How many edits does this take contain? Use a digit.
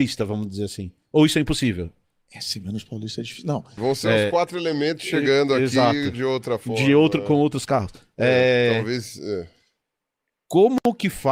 1